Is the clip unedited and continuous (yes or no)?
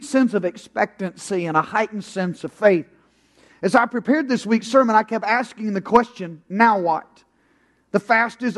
yes